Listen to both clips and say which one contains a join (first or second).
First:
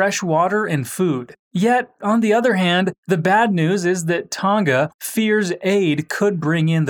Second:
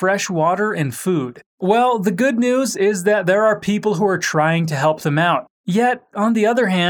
first